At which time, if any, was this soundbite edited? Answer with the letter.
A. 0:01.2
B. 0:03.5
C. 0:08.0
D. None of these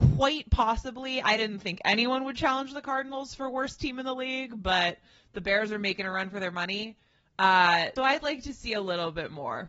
C